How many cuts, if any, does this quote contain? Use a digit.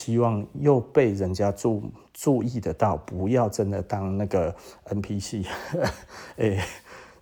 0